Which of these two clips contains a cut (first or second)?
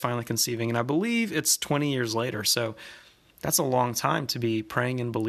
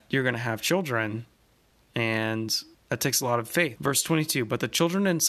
second